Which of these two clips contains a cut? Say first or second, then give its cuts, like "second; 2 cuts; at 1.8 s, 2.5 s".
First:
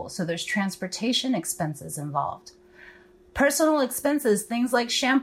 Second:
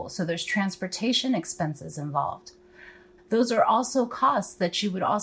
second; 1 cut; at 3.2 s